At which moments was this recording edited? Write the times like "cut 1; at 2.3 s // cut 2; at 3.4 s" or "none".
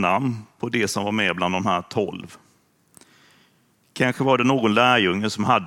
none